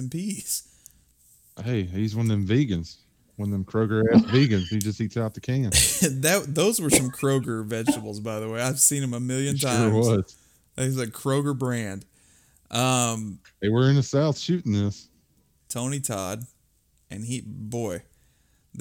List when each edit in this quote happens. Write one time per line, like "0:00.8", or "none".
0:15.6